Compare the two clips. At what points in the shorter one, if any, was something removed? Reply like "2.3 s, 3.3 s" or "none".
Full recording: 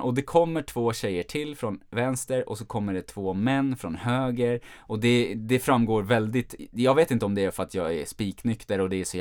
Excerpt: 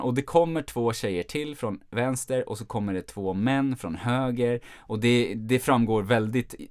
none

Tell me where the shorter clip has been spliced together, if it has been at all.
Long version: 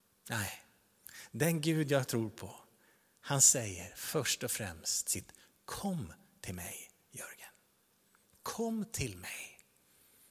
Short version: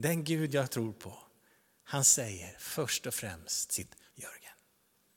4.1 s

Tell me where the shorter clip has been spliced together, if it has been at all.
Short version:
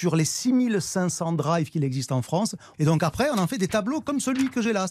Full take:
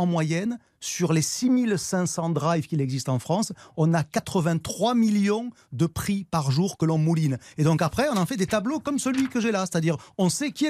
2.7 s

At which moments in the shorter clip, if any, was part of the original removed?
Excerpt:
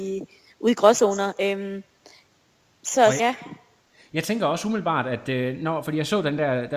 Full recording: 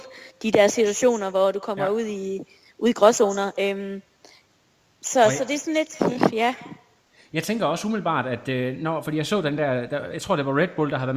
3.2 s

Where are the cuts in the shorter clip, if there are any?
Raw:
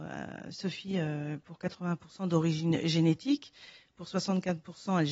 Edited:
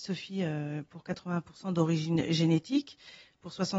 none

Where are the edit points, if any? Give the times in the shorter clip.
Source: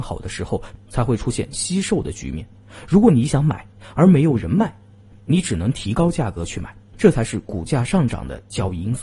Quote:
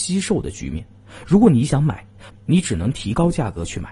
2.3 s

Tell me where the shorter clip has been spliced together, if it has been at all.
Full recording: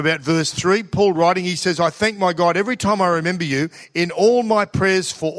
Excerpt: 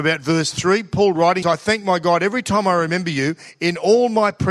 1.4 s

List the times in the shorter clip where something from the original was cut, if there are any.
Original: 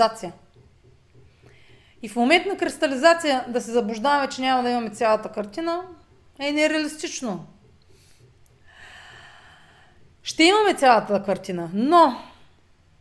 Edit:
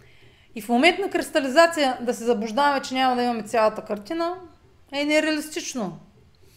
none

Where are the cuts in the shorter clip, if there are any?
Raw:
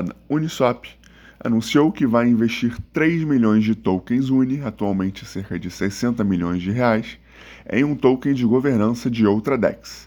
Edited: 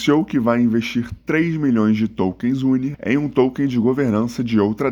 2.9 s

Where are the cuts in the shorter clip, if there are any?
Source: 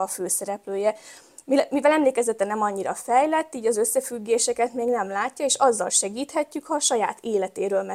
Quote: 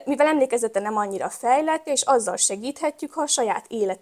1.9 s

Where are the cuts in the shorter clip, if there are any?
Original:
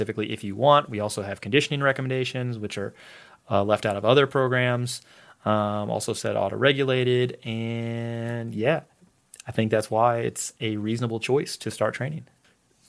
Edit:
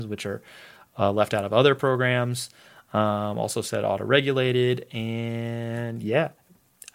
none

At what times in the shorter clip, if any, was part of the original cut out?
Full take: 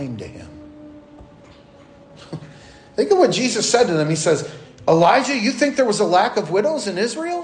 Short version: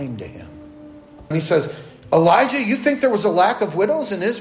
1.3 s

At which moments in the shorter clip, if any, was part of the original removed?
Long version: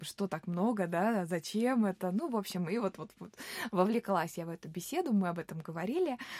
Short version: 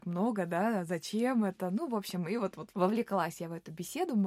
2.7 s

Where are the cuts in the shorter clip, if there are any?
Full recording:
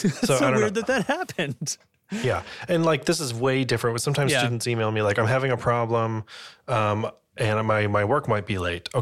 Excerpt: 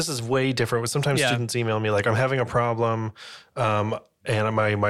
none

